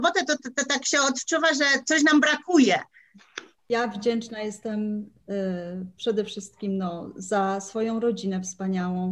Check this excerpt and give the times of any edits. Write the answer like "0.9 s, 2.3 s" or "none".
none